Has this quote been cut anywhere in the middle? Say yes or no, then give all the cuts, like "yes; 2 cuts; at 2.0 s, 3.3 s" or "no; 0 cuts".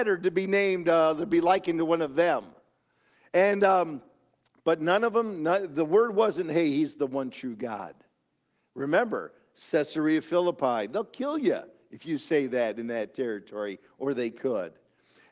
no; 0 cuts